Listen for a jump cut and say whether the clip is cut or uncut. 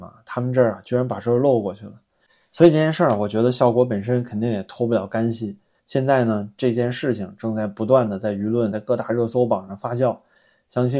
cut